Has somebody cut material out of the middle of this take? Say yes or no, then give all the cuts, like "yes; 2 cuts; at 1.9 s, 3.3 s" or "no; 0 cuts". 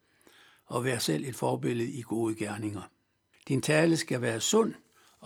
yes; 1 cut; at 3.3 s